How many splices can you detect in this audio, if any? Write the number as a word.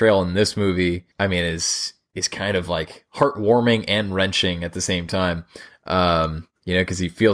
one